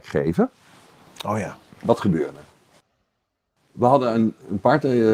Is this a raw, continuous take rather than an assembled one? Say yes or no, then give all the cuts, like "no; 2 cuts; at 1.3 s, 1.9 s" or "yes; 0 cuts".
yes; 0 cuts